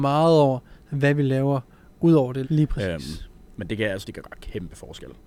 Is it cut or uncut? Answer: cut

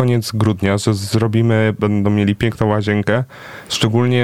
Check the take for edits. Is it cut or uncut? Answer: cut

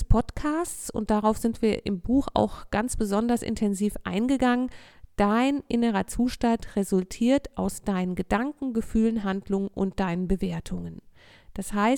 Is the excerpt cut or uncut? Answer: uncut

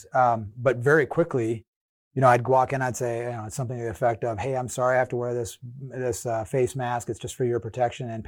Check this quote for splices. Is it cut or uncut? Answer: uncut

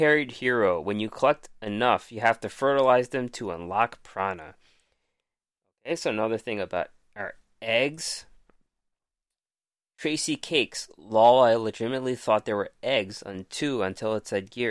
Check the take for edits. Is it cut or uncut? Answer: uncut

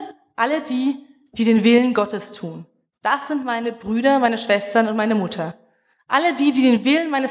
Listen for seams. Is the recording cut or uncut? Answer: uncut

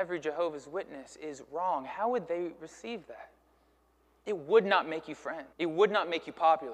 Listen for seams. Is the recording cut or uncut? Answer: cut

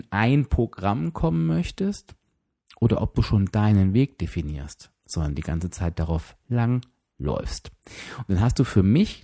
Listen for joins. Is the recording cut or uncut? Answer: cut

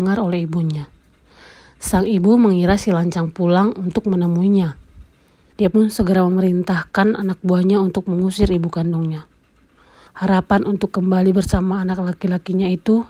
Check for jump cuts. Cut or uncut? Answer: cut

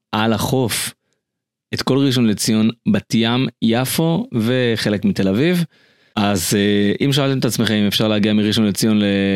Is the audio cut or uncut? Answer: cut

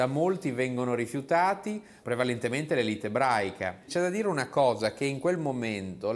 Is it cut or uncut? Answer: cut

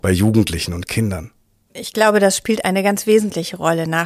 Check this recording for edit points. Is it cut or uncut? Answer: uncut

